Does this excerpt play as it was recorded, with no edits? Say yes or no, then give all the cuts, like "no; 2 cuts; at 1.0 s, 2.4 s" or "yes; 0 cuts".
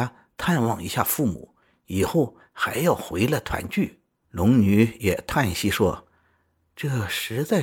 no; 1 cut; at 4.2 s